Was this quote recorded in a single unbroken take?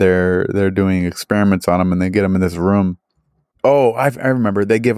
no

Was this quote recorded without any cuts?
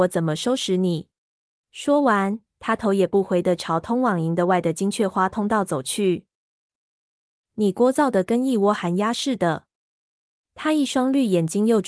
no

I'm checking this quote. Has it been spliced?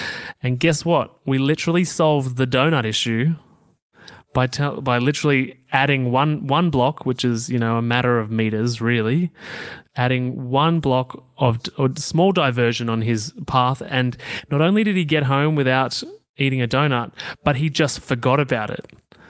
no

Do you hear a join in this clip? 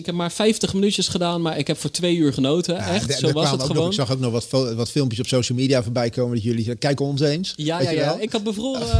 no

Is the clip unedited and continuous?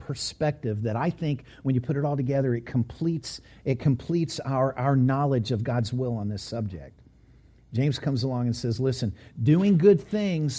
yes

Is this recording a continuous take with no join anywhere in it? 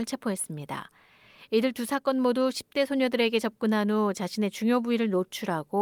yes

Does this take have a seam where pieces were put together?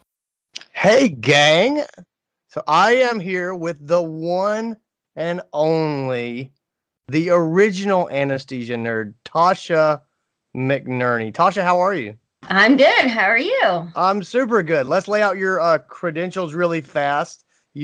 no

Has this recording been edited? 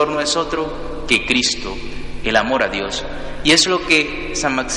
yes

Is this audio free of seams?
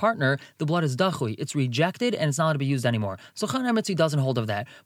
yes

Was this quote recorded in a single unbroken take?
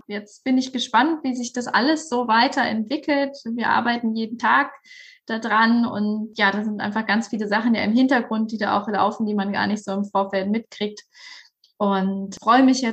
yes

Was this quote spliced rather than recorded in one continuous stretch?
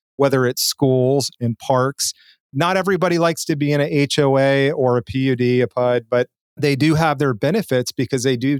no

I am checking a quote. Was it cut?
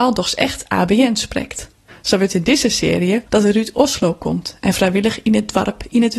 yes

